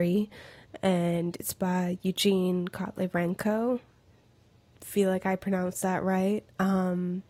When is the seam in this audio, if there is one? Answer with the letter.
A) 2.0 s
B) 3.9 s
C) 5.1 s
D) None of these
D